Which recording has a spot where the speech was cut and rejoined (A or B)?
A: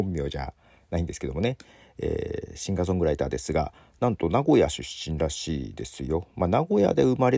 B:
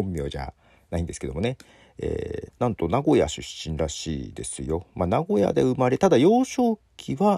B